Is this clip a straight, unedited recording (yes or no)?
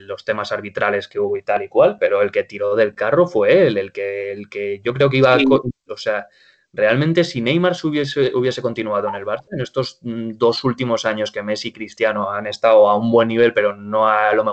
no